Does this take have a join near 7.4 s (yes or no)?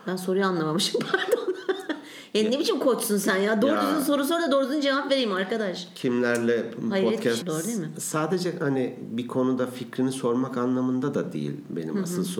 yes